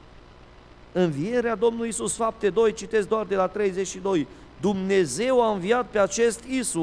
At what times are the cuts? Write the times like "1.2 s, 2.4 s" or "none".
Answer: none